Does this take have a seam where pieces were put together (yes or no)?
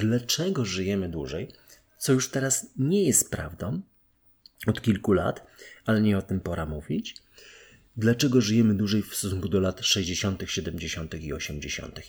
no